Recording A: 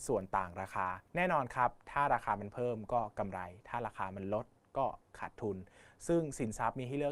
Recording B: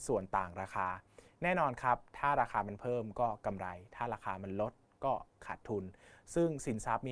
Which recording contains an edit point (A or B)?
A